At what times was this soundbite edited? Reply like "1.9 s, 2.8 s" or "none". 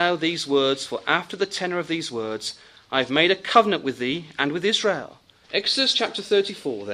5.4 s